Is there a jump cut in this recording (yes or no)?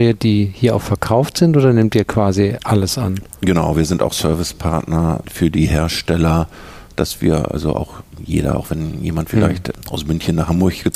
no